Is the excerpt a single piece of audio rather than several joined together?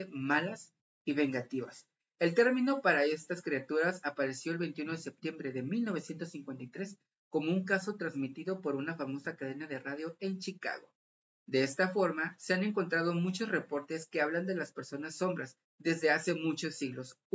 no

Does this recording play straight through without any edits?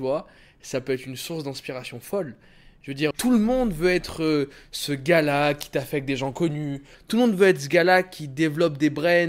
no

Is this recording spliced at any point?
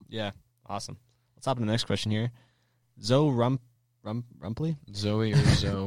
no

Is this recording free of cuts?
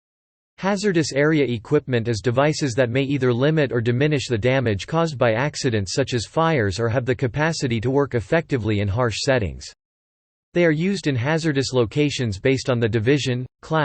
yes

